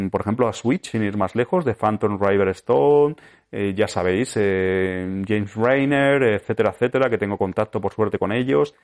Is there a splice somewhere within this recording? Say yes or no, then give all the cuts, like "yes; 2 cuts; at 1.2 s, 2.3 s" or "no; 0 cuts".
no; 0 cuts